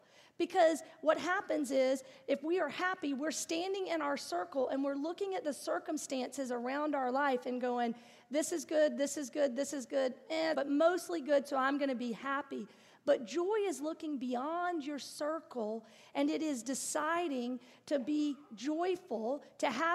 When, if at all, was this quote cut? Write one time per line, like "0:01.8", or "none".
0:10.5